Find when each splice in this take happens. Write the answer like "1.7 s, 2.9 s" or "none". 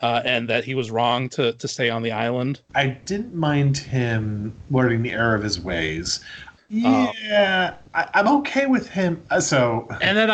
2.7 s, 6.6 s